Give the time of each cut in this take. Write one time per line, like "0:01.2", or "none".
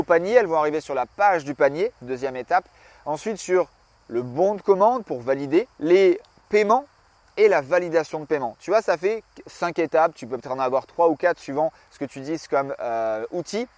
0:05.7